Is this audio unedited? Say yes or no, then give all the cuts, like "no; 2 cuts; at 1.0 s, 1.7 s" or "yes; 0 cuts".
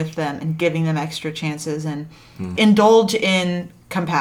no; 1 cut; at 2.6 s